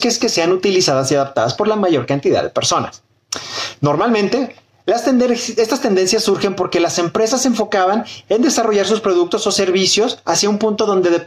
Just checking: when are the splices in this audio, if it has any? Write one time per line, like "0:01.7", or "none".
none